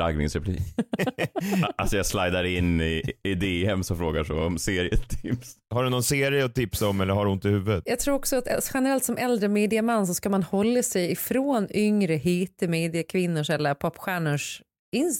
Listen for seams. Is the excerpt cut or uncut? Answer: uncut